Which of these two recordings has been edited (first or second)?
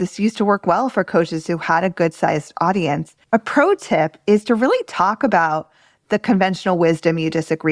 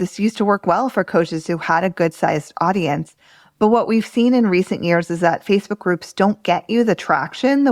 first